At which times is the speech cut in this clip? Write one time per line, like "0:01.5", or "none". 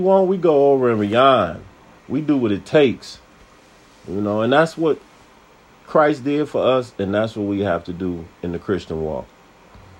0:02.0